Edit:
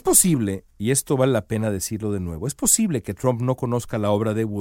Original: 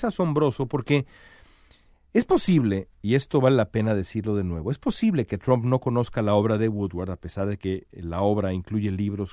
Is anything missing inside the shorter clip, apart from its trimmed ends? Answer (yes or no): no